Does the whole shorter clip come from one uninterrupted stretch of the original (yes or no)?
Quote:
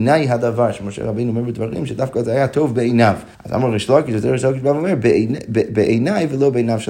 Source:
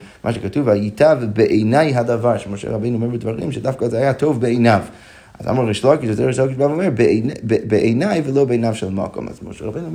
no